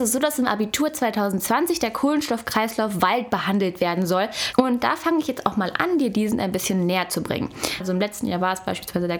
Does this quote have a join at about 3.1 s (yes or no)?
no